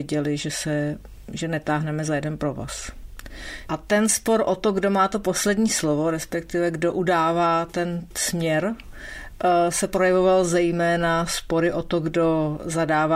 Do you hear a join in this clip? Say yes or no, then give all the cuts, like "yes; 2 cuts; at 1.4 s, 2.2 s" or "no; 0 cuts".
yes; 1 cut; at 3.7 s